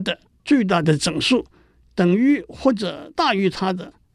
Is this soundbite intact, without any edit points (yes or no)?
no